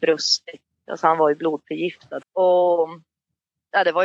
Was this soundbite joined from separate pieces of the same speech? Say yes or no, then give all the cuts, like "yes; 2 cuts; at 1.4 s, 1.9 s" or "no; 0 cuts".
yes; 1 cut; at 2.2 s